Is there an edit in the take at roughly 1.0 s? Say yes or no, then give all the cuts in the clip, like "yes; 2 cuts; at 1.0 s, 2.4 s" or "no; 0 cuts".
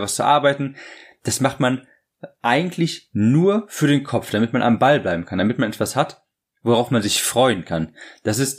no; 0 cuts